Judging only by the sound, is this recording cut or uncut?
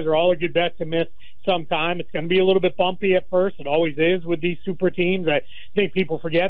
uncut